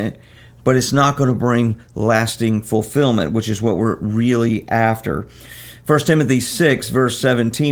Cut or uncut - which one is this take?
uncut